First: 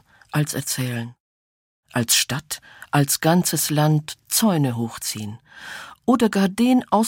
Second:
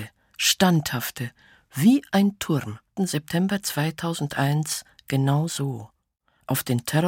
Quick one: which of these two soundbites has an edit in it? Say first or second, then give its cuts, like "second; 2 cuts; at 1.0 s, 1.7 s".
second; 1 cut; at 3.0 s